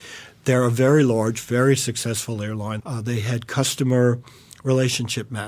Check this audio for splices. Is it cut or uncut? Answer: cut